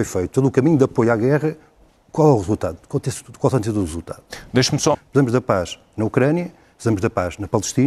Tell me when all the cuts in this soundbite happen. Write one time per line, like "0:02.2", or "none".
0:04.9